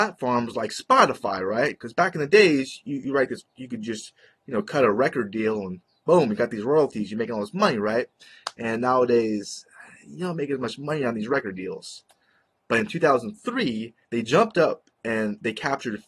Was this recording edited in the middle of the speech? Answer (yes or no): yes